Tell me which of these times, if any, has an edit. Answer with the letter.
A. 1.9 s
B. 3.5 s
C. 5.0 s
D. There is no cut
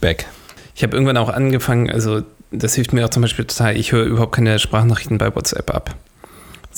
D